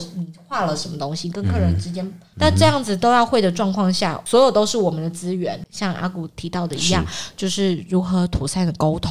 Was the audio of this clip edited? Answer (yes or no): yes